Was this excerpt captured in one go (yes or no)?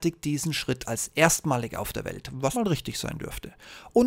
no